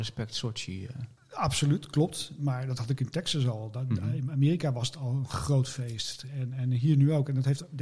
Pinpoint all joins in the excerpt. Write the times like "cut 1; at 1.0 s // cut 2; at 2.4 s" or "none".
none